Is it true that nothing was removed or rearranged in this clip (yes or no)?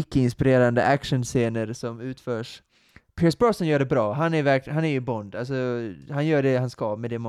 yes